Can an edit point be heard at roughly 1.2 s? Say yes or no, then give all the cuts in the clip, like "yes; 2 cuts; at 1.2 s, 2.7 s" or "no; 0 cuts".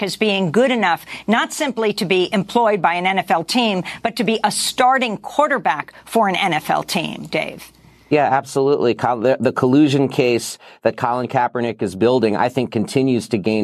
no; 0 cuts